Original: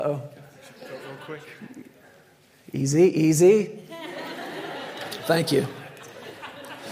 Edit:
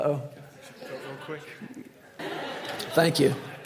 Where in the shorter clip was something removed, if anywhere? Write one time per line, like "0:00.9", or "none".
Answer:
0:02.2